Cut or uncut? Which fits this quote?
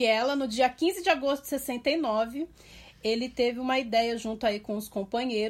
uncut